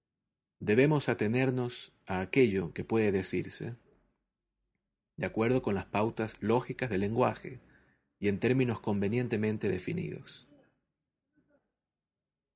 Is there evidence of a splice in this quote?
no; 0 cuts

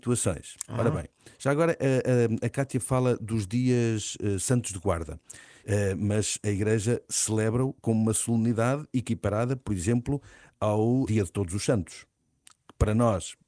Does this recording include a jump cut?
yes; 2 cuts; at 5.6 s, 11.0 s

